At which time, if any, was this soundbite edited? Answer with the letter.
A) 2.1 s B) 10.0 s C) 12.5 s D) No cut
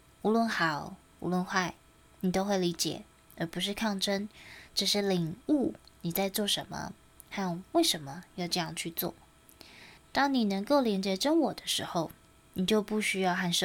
B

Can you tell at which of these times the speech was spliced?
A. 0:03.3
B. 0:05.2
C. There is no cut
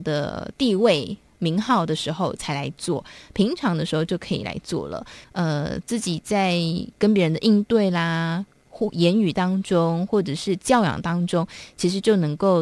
B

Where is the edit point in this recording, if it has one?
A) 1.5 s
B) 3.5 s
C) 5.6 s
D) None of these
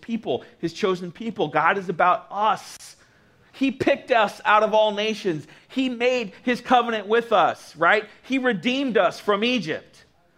B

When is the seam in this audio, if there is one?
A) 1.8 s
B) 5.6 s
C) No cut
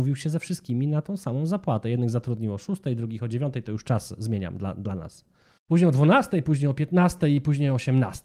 B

